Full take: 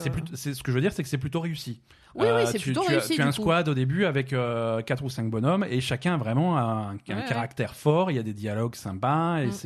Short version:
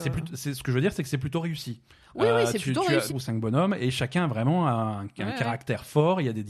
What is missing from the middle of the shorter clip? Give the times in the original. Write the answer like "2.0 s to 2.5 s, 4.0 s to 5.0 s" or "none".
3.1 s to 5.0 s